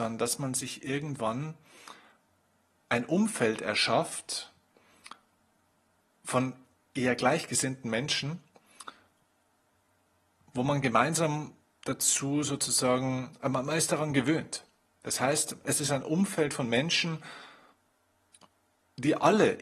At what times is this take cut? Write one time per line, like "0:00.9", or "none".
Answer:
none